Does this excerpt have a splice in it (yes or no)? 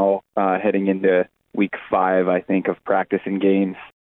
no